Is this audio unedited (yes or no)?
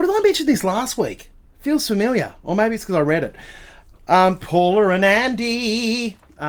no